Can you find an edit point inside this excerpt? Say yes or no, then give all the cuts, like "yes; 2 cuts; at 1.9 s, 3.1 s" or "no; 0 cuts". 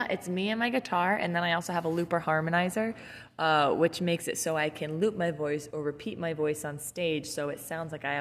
no; 0 cuts